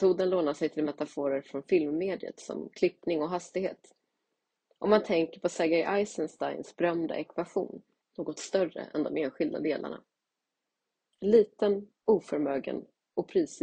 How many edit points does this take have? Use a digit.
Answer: 2